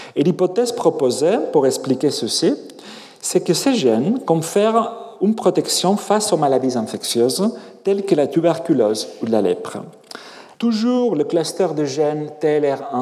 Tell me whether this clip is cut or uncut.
cut